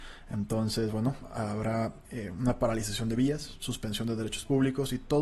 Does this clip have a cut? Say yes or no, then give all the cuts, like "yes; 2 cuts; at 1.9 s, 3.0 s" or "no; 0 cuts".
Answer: no; 0 cuts